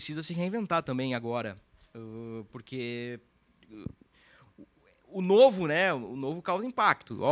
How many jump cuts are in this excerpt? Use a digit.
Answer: 0